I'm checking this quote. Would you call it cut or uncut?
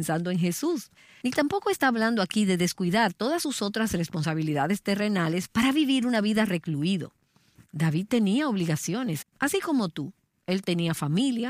cut